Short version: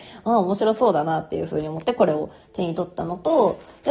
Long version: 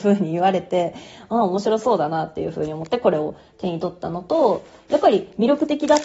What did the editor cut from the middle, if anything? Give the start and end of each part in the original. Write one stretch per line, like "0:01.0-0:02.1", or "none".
none